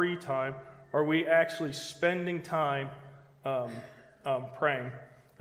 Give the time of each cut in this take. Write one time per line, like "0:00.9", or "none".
none